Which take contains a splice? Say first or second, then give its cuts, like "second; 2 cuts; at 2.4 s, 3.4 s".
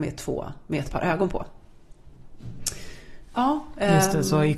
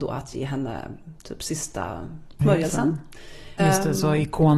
second; 2 cuts; at 2.4 s, 3.6 s